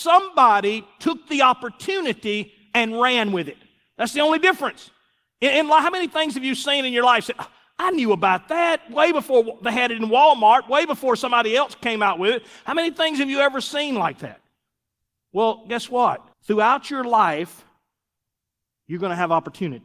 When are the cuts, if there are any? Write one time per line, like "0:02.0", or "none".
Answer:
0:16.3

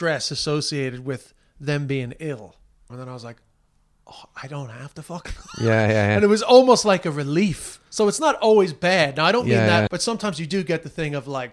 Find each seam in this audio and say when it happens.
0:02.9
0:07.9
0:09.9

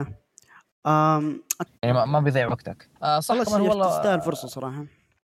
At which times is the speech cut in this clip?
0:01.7
0:03.0

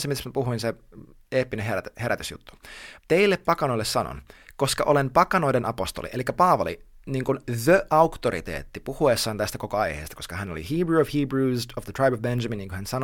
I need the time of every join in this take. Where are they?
0:03.0

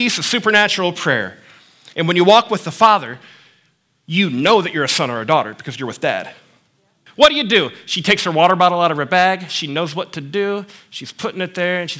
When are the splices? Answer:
0:01.9
0:07.1

